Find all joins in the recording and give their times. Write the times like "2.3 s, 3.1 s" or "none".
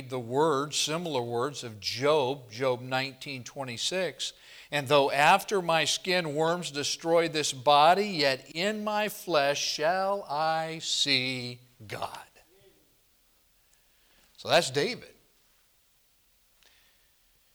none